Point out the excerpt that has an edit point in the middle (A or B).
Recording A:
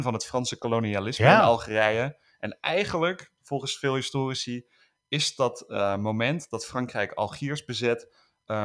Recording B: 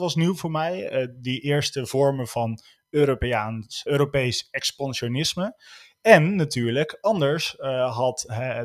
B